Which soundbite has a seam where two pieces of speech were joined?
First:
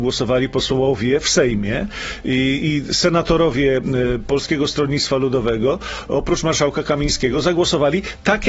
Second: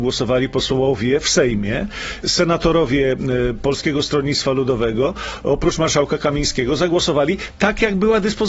second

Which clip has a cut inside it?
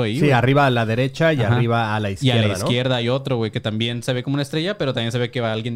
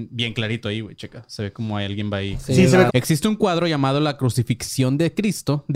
second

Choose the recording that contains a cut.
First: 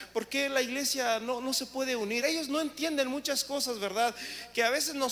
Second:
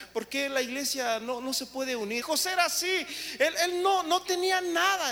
second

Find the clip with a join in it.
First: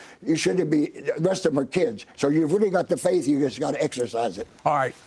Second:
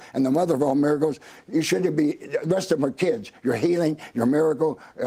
first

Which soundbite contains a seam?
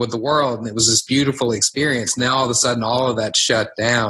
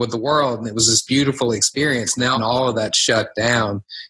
second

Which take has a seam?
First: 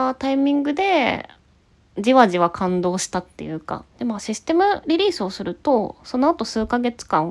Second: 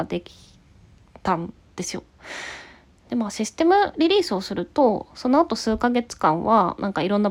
first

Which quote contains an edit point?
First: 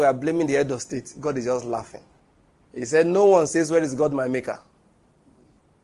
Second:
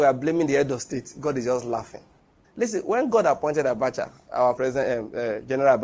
second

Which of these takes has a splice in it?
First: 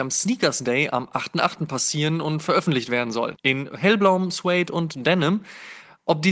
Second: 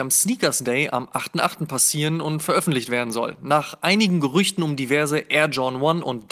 first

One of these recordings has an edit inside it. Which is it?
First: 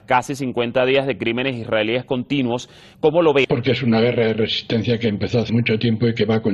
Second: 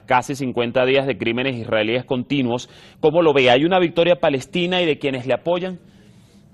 first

